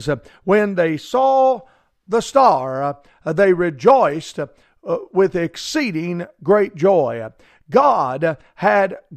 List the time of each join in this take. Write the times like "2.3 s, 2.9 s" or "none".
none